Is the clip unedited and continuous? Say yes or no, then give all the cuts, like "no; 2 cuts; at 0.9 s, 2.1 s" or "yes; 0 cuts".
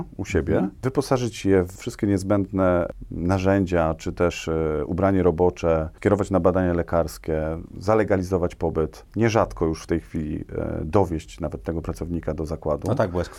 no; 1 cut; at 9.1 s